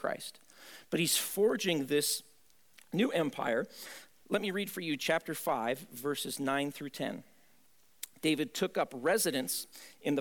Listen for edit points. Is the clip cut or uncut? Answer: uncut